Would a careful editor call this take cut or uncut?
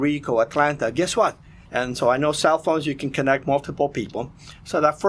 cut